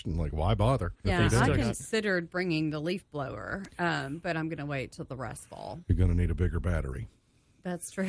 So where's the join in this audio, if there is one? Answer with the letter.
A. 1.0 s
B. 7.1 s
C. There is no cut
A